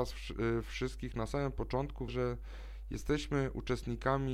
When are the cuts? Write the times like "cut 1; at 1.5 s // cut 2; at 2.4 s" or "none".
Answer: cut 1; at 2.1 s

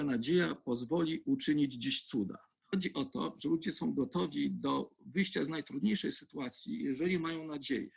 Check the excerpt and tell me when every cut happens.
none

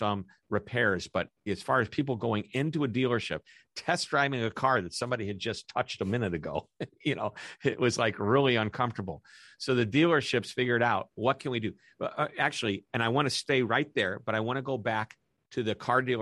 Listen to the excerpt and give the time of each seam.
none

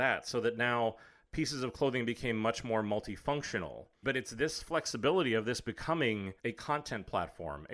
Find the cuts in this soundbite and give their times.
cut 1; at 4.0 s // cut 2; at 6.4 s

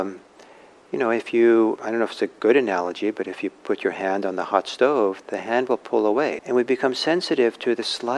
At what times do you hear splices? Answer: cut 1; at 1.8 s // cut 2; at 6.4 s

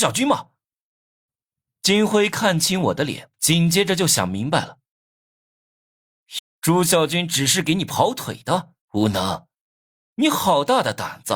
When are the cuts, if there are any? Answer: cut 1; at 3.3 s // cut 2; at 6.4 s // cut 3; at 8.8 s

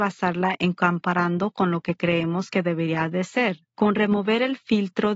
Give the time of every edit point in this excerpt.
cut 1; at 3.7 s

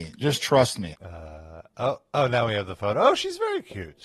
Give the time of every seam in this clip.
cut 1; at 0.9 s

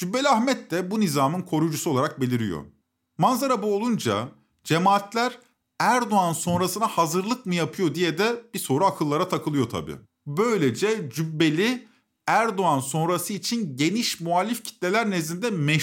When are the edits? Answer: cut 1; at 10.1 s

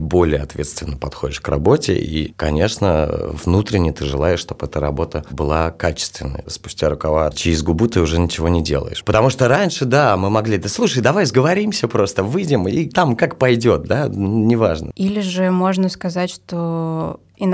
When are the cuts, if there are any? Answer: cut 1; at 14.9 s

